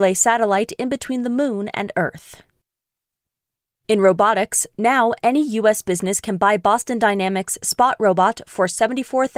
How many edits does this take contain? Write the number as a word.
zero